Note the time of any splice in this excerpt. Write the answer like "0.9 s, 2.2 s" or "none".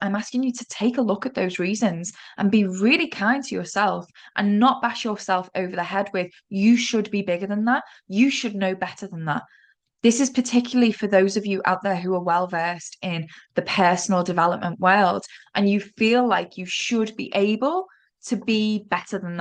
none

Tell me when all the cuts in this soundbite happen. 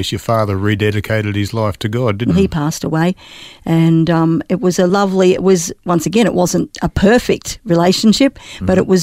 2.3 s

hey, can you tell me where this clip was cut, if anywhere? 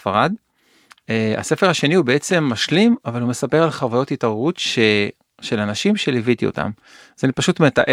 none

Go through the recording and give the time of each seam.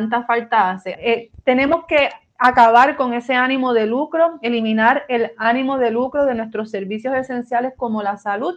0.9 s

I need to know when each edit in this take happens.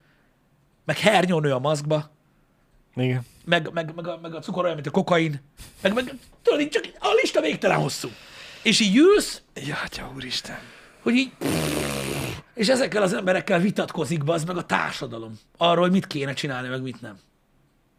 none

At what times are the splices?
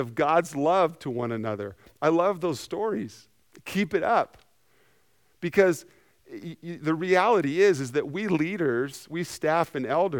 9.1 s

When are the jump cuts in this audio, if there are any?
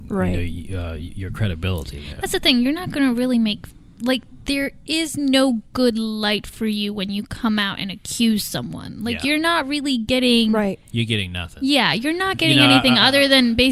none

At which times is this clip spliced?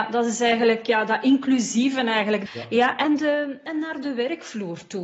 2.5 s

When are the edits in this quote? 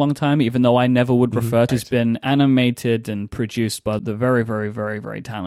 1.7 s, 4.0 s

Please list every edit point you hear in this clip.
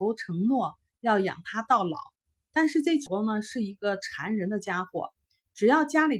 3.1 s

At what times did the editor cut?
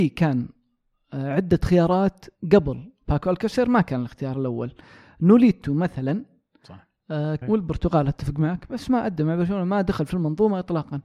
7.4 s

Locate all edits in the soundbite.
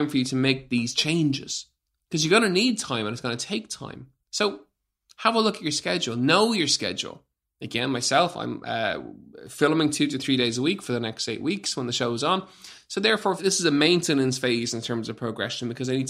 13.4 s

